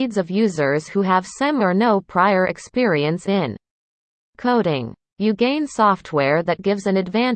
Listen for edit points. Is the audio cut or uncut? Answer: cut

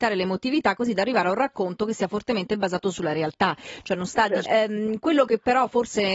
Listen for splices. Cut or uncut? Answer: cut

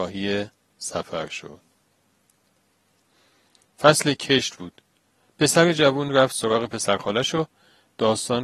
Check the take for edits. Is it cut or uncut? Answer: uncut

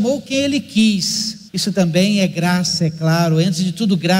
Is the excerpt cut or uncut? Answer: cut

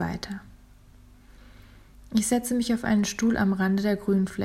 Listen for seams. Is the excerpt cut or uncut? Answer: uncut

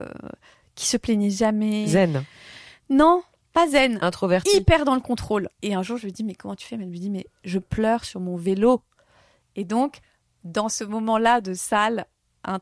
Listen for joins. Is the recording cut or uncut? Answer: cut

